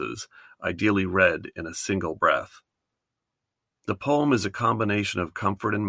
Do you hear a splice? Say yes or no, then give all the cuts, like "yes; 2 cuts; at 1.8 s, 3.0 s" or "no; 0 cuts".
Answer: no; 0 cuts